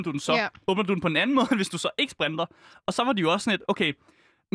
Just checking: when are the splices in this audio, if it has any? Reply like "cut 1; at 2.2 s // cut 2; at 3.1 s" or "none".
none